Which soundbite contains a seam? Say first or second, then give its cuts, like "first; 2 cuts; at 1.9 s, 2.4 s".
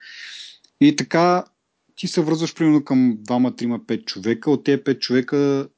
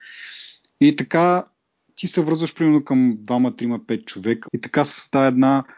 second; 1 cut; at 4.4 s